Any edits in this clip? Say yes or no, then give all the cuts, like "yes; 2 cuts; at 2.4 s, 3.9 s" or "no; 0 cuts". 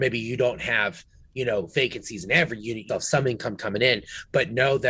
yes; 1 cut; at 2.9 s